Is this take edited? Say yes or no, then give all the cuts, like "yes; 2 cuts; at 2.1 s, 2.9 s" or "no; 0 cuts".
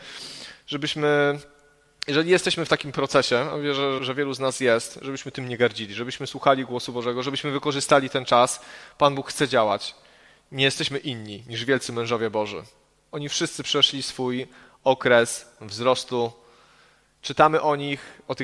yes; 1 cut; at 4.0 s